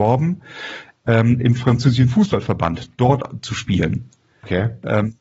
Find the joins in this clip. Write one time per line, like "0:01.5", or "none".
none